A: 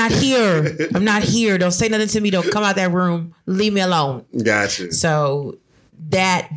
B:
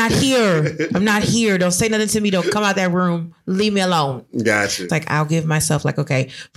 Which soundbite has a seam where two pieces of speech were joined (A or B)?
B